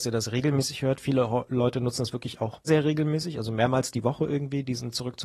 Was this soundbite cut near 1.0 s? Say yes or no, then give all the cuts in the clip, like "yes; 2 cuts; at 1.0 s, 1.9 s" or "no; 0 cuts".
no; 1 cut; at 2.7 s